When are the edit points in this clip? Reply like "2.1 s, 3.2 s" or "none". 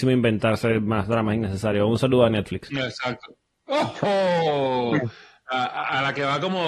none